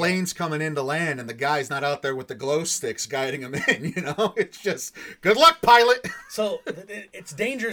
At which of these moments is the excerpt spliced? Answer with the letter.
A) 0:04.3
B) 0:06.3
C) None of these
C